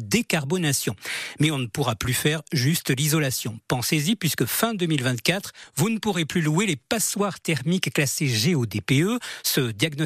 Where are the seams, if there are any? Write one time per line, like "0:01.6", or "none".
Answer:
none